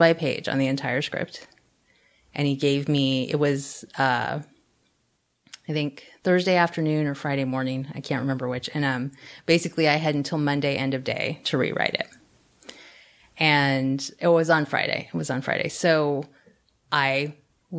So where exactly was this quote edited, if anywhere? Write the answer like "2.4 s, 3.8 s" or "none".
none